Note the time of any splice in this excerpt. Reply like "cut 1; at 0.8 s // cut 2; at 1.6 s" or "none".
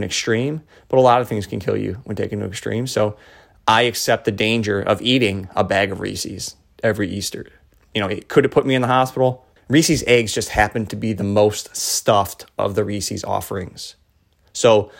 cut 1; at 9.6 s

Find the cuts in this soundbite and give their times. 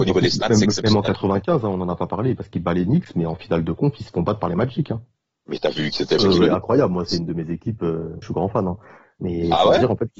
cut 1; at 6.2 s // cut 2; at 8.2 s

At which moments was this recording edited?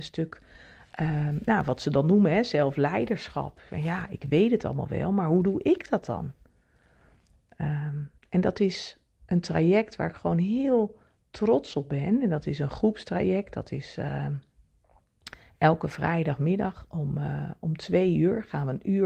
cut 1; at 8.2 s

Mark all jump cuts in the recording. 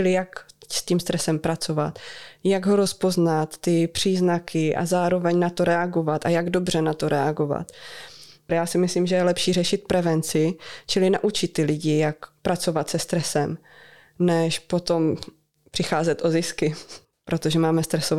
cut 1; at 8.5 s

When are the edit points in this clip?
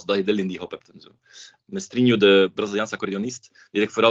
cut 1; at 1.6 s

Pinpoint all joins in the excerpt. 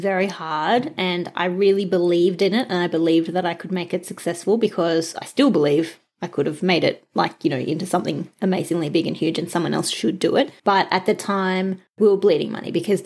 none

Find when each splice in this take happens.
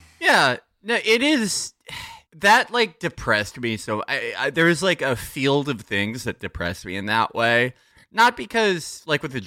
cut 1; at 2.3 s

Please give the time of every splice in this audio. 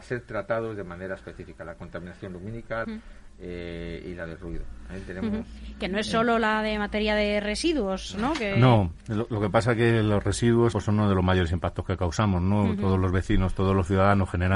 cut 1; at 2.8 s // cut 2; at 10.7 s

